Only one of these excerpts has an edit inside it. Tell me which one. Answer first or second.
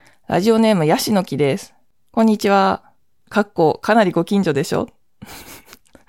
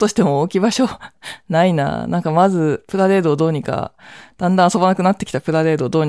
first